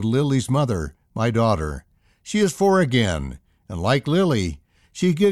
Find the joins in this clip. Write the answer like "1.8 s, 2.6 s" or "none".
none